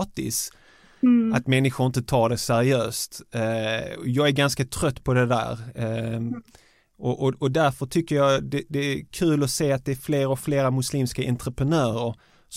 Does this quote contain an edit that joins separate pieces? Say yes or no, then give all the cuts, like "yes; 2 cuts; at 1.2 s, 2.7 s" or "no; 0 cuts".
no; 0 cuts